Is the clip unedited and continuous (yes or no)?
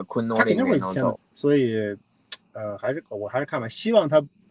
no